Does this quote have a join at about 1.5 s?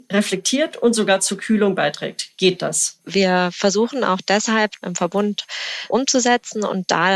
no; 2 cuts; at 3.0 s, 4.8 s

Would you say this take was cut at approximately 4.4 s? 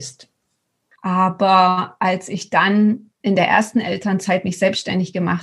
no; 2 cuts; at 0.9 s, 3.2 s

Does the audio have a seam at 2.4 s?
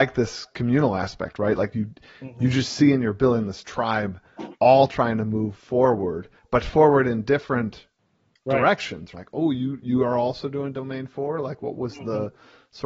no; 1 cut; at 9.1 s

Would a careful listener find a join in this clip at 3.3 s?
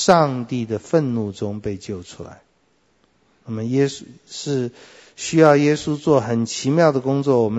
no; 0 cuts

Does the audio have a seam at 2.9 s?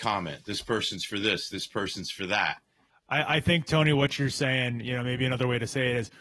yes; 1 cut; at 2.9 s

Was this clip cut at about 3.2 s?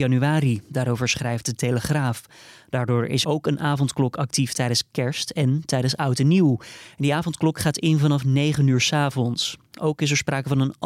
yes; 1 cut; at 3.2 s

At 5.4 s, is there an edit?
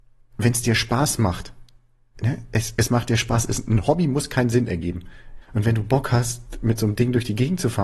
yes; 1 cut; at 5.4 s

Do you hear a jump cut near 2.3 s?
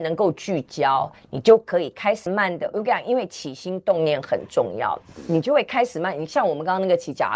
yes; 1 cut; at 2.3 s

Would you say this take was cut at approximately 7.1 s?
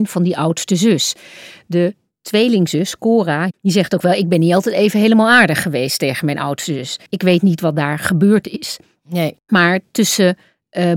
yes; 1 cut; at 7.1 s

